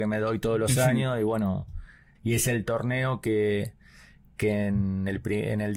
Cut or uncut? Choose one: cut